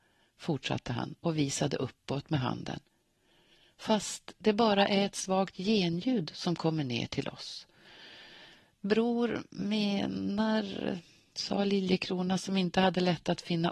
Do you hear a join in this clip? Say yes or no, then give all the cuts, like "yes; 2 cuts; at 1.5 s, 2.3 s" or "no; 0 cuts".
no; 0 cuts